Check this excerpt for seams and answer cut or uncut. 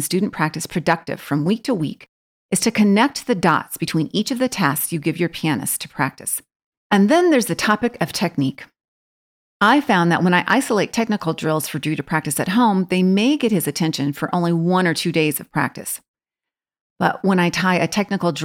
cut